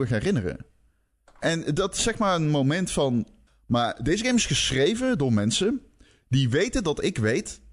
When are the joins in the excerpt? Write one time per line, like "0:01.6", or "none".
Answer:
0:03.5